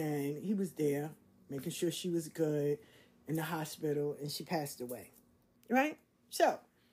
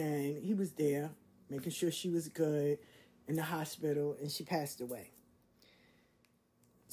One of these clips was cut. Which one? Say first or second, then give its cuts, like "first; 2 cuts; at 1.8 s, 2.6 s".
first; 1 cut; at 5.5 s